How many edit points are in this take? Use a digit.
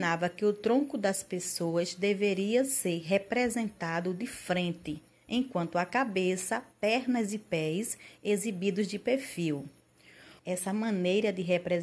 1